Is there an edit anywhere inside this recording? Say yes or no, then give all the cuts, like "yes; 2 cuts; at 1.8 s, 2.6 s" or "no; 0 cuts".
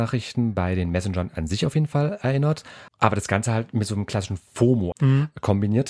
yes; 2 cuts; at 2.9 s, 4.9 s